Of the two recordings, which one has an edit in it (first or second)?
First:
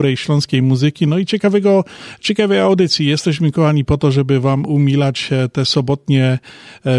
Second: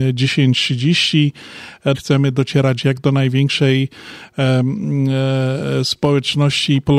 second